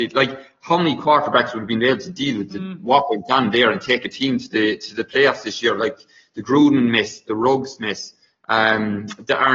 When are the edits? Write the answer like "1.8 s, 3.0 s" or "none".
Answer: none